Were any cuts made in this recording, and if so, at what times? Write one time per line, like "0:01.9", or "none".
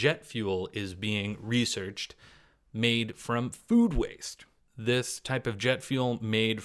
none